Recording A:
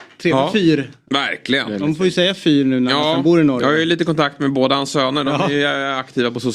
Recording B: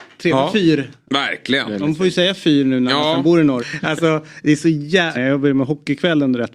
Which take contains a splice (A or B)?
B